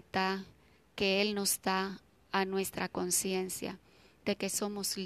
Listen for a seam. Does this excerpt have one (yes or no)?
no